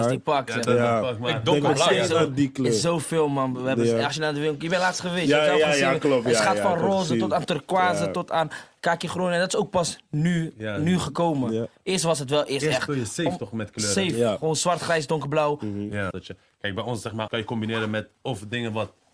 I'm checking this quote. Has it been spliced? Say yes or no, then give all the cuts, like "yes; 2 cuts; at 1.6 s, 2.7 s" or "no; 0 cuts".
yes; 2 cuts; at 16.1 s, 17.3 s